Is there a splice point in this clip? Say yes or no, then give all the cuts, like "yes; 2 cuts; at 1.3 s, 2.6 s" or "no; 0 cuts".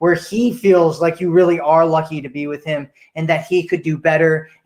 no; 0 cuts